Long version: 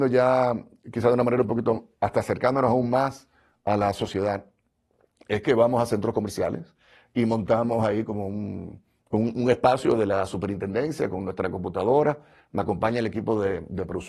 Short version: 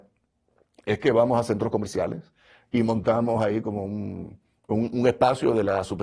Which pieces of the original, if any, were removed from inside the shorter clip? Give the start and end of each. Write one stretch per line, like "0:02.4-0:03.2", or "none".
none